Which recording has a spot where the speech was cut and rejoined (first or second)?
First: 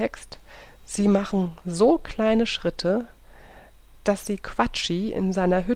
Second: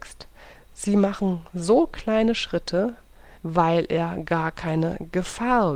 second